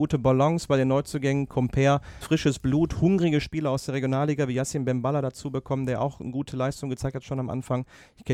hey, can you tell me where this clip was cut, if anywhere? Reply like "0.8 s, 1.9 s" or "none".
2.2 s